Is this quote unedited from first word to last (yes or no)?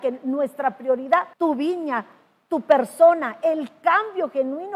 no